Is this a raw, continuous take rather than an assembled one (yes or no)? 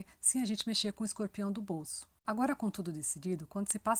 no